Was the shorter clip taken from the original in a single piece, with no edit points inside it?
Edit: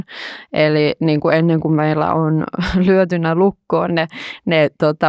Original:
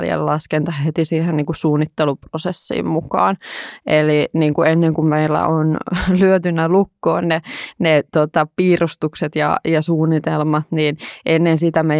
yes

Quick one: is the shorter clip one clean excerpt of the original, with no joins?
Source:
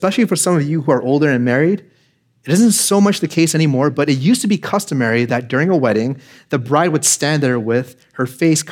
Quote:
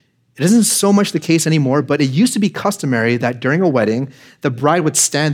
yes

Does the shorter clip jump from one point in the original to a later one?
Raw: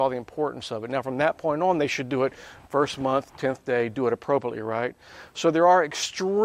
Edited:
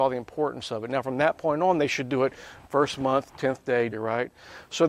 yes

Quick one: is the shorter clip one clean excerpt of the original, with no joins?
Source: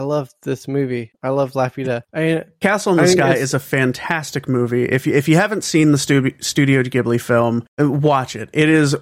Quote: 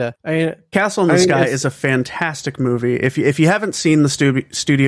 yes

